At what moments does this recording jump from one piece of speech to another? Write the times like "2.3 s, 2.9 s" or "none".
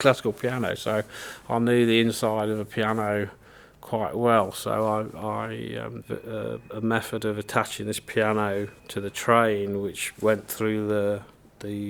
6.0 s, 8.8 s